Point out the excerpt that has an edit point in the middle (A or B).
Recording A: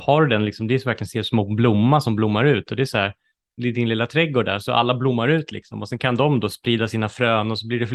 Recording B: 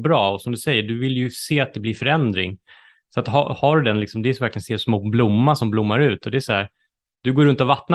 A